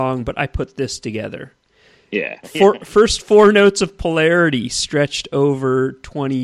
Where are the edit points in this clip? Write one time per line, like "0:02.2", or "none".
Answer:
0:02.4